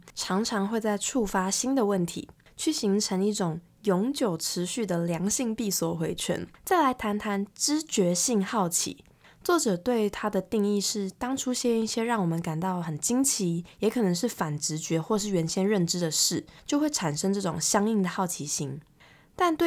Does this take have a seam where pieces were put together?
yes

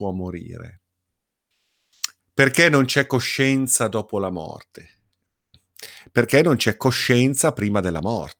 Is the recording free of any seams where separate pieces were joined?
no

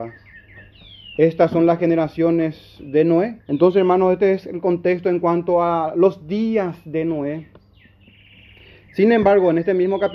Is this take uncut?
no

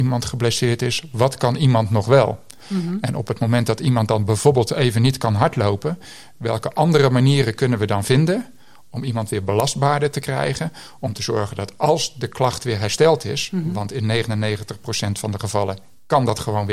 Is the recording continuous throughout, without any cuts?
no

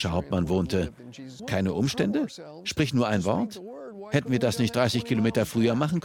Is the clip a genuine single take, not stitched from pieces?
no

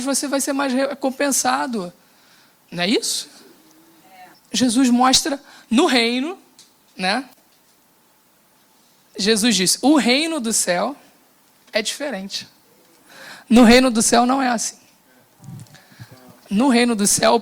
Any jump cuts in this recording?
yes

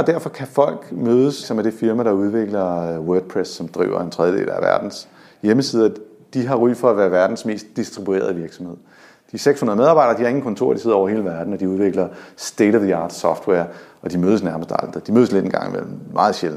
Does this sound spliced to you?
yes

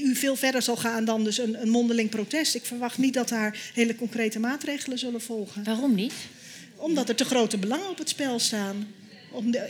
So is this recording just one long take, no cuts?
yes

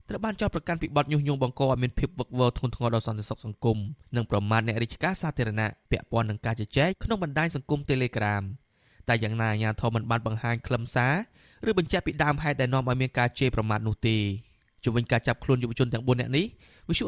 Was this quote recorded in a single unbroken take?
no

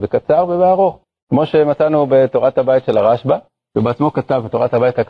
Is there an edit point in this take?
no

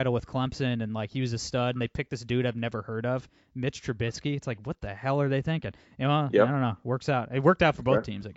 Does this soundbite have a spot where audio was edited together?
no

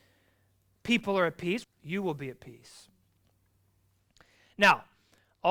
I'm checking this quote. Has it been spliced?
yes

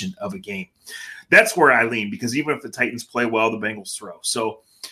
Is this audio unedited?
yes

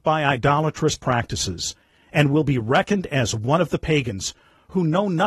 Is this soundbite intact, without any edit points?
yes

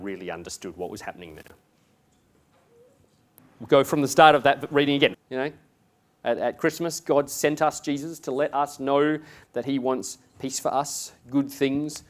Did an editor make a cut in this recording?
yes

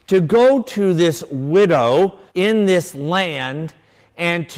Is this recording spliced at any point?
yes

